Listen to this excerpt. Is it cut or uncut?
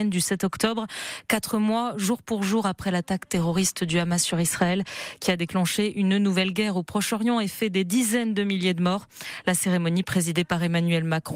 uncut